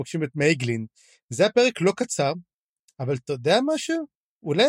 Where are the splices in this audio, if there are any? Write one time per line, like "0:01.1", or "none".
none